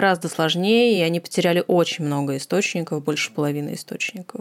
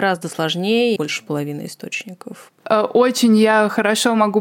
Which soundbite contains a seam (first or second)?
second